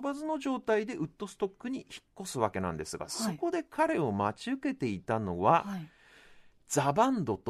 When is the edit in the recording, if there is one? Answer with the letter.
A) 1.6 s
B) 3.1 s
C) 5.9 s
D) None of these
D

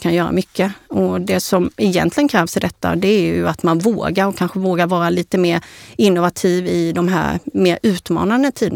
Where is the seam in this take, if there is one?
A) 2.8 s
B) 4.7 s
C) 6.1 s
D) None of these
D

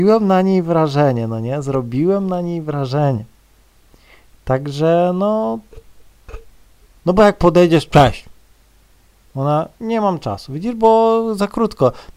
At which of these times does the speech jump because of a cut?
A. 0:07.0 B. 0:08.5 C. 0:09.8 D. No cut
A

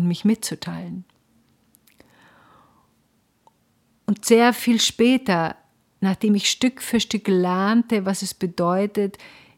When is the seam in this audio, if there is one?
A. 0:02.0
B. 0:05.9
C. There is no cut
C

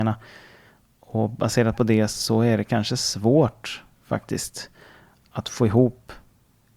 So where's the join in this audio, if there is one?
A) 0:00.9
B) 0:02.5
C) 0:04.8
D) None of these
D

